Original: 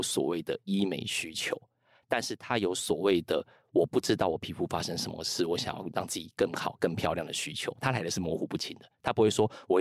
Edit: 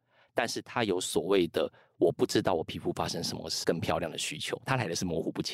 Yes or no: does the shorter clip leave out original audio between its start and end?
yes